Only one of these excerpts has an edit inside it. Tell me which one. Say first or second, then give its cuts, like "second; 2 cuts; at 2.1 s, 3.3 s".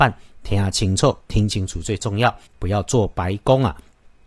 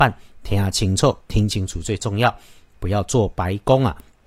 first; 1 cut; at 2.5 s